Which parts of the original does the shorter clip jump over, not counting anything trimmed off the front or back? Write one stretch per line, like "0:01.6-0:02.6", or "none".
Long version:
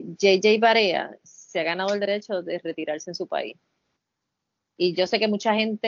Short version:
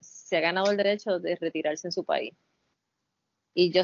none